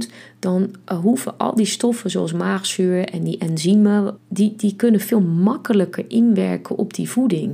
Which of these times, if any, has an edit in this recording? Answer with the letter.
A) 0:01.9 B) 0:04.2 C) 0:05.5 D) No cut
B